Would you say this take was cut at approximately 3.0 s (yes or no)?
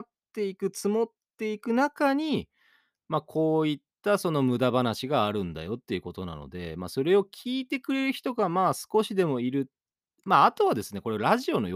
no